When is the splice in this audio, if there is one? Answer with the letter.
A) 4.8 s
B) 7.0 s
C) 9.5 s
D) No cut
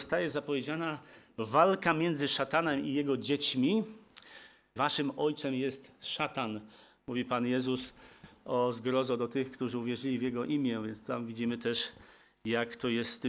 A